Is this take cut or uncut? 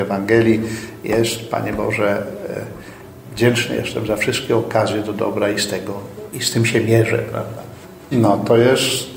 cut